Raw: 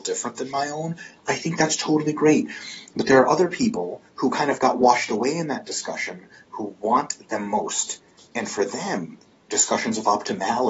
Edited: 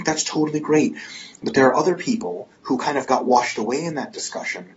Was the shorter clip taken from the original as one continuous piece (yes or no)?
yes